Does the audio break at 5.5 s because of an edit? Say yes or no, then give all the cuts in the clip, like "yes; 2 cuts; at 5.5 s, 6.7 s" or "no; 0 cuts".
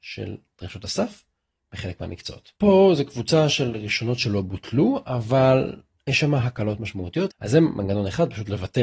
no; 2 cuts; at 2.6 s, 7.3 s